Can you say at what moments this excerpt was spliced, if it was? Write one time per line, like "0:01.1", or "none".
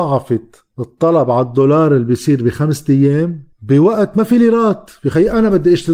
0:03.5